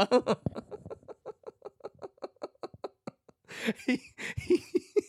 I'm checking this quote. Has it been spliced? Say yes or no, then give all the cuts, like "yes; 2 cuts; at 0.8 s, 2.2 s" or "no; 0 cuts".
no; 0 cuts